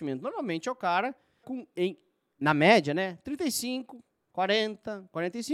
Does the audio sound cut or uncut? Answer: cut